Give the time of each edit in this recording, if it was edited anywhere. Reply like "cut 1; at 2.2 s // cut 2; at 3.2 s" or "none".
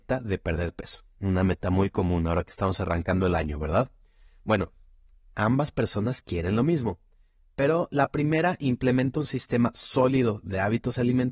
none